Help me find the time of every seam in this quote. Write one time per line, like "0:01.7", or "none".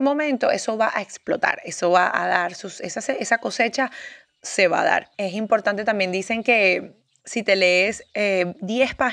0:05.1